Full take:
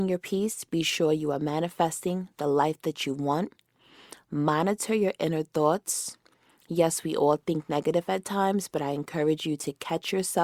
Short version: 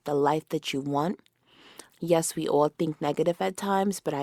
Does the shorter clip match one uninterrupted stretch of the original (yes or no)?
no